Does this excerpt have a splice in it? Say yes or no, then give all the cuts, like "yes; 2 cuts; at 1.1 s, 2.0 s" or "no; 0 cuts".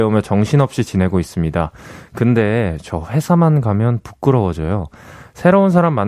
no; 0 cuts